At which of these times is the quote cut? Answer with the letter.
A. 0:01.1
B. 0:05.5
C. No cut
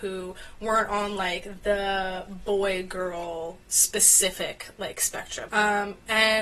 B